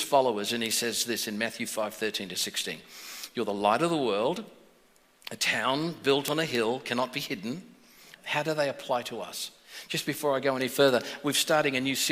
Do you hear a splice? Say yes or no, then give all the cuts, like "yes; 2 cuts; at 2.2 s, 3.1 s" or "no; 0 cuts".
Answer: yes; 1 cut; at 8.2 s